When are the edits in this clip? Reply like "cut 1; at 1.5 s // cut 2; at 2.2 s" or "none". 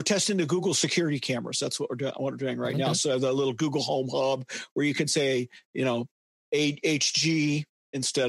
none